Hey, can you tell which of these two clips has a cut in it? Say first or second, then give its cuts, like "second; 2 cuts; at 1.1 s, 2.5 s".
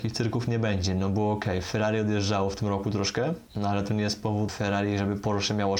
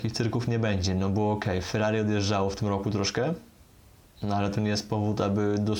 first; 2 cuts; at 3.5 s, 4.5 s